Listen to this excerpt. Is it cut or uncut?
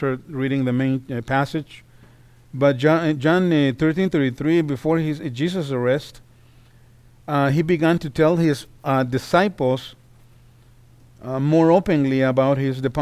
uncut